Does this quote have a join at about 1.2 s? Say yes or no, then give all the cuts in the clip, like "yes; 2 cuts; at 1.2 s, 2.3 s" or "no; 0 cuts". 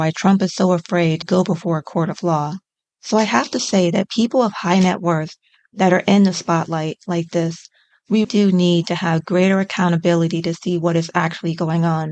yes; 3 cuts; at 1.2 s, 2.8 s, 8.2 s